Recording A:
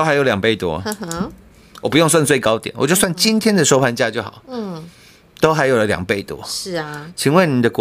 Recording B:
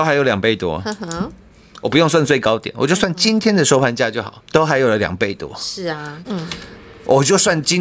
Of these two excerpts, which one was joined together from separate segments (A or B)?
B